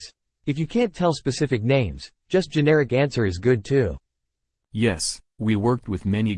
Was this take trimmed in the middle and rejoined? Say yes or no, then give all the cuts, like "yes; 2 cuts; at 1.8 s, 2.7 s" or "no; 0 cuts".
no; 0 cuts